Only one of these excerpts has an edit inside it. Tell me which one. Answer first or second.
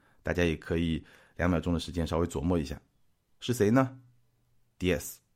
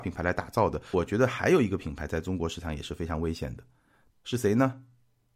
second